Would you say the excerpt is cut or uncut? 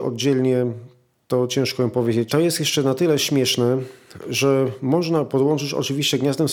cut